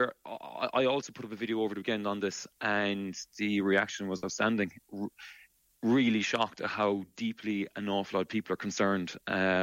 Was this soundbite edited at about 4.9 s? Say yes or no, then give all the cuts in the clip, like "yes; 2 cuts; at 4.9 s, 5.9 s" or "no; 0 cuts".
yes; 1 cut; at 4.9 s